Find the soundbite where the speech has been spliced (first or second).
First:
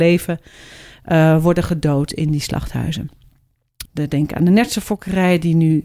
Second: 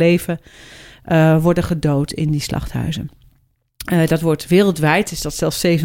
first